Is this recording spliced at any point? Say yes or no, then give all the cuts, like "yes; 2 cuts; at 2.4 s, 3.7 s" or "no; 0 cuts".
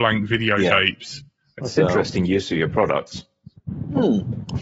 yes; 1 cut; at 1.6 s